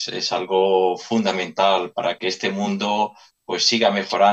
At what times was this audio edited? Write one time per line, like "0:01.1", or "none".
0:02.2